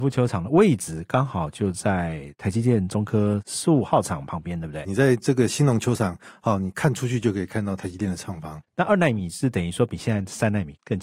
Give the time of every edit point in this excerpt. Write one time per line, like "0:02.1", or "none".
0:04.8
0:08.6